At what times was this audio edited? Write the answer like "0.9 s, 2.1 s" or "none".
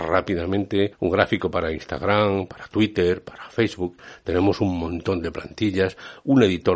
none